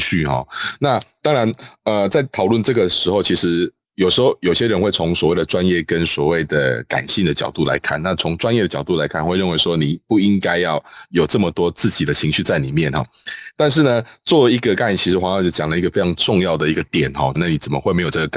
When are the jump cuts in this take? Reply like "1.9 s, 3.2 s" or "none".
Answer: 17.3 s